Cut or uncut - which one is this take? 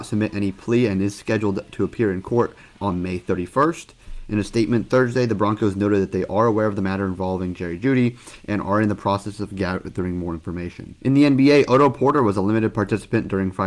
uncut